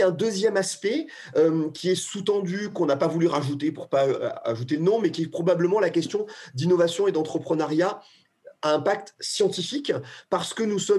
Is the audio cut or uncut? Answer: uncut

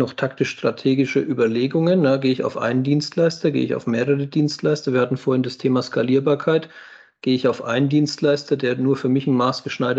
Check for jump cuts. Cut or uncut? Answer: uncut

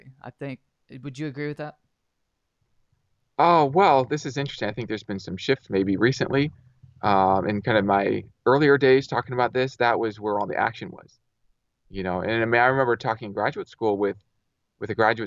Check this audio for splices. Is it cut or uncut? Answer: uncut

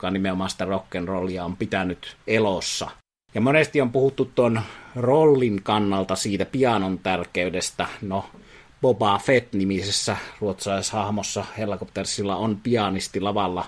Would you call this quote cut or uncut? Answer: cut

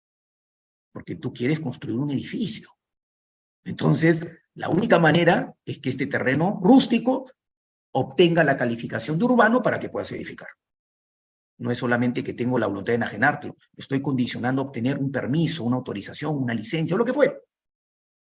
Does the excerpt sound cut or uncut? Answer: cut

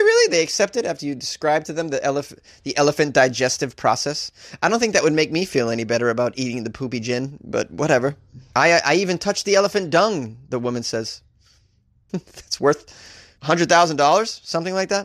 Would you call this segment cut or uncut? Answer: cut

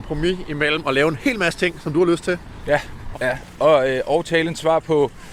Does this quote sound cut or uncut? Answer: cut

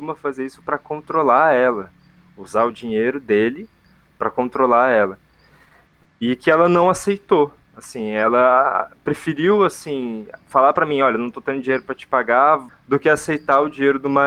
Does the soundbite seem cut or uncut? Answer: cut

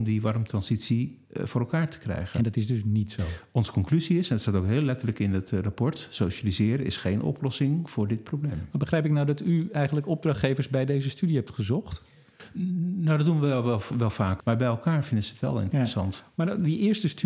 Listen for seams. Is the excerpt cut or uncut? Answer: cut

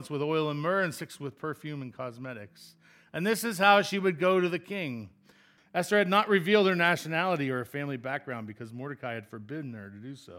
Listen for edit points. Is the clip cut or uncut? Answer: cut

